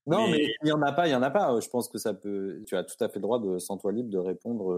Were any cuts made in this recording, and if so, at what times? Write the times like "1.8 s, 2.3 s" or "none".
2.6 s